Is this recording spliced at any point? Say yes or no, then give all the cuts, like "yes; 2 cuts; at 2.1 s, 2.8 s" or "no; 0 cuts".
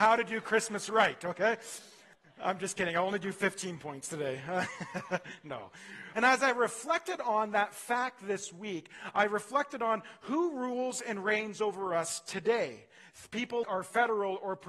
yes; 2 cuts; at 6.1 s, 13.6 s